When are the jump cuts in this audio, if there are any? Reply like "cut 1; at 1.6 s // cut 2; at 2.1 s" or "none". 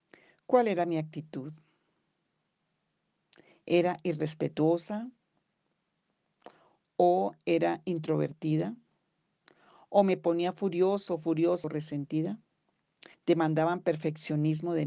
cut 1; at 11.6 s // cut 2; at 13.1 s